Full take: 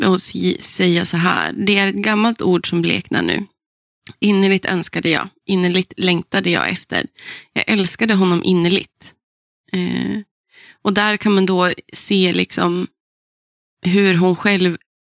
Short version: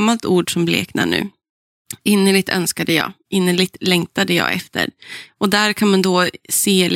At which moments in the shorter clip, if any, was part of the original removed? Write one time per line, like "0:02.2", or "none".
0:05.3